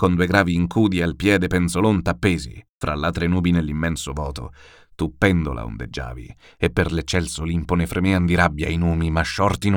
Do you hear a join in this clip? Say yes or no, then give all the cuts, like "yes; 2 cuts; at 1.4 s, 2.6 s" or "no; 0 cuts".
yes; 1 cut; at 2.7 s